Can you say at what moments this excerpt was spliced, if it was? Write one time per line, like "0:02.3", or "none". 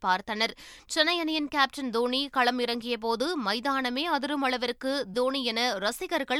0:05.1